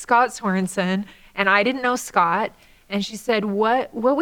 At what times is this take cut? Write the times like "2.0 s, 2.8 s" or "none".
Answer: none